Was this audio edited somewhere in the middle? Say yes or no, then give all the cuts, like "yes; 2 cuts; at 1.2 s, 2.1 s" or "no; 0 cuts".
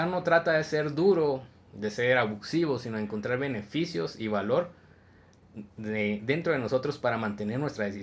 no; 0 cuts